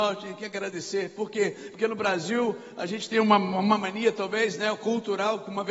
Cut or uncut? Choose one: uncut